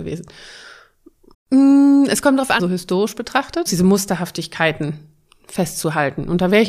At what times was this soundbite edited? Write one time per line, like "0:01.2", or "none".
0:01.3
0:02.6
0:03.7